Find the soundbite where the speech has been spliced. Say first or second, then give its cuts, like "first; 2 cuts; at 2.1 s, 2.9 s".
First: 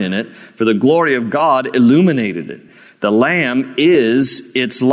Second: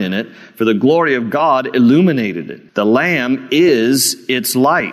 second; 1 cut; at 2.7 s